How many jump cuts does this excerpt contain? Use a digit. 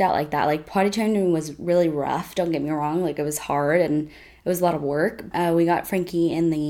1